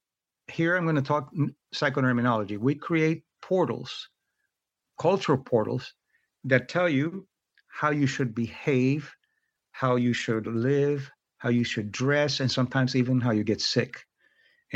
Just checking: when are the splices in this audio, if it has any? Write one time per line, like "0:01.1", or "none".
none